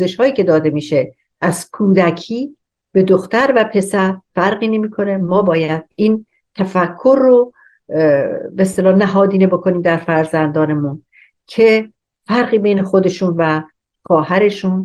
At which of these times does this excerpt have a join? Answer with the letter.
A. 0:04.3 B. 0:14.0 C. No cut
A